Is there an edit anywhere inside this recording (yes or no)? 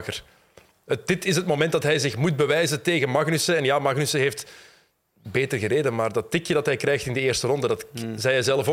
no